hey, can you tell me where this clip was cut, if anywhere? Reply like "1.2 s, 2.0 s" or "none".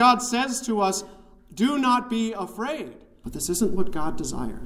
3.2 s

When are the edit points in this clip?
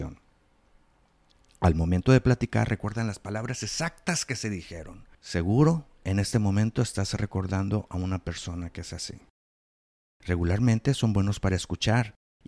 5.1 s

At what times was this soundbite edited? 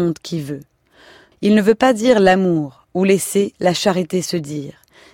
1.3 s

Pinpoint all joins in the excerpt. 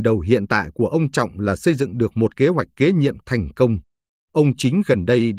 4.1 s

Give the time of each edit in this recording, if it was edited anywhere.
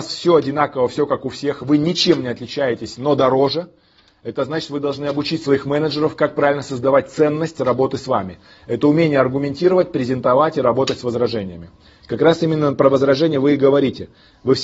none

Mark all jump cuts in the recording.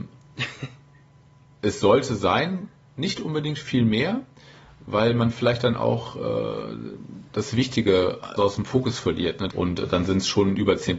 8.4 s, 9.5 s

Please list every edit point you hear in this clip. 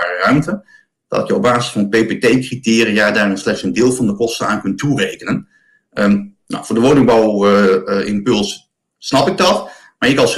none

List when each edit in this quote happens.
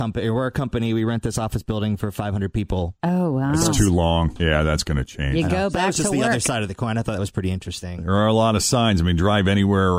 3.0 s, 4.4 s

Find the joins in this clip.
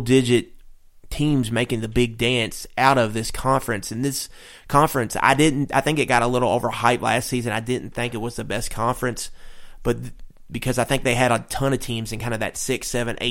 none

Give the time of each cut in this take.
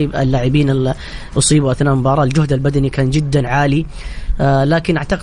3.5 s

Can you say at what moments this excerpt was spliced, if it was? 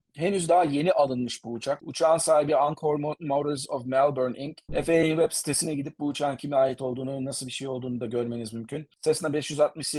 1.8 s, 4.7 s

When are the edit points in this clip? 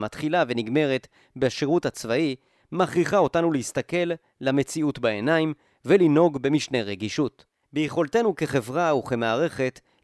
7.6 s

